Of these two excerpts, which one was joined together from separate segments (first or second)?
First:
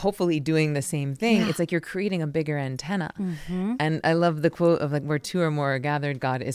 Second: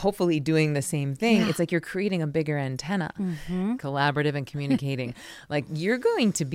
second